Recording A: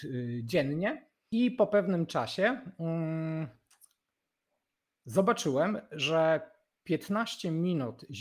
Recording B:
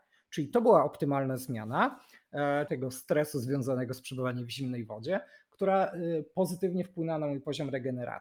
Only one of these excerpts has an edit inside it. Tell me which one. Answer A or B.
B